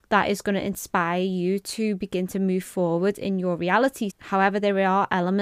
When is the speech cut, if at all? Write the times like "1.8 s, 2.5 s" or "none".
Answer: 4.1 s